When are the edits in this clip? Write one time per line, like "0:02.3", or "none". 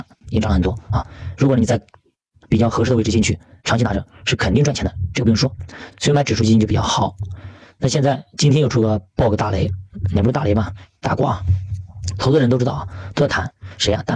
0:05.9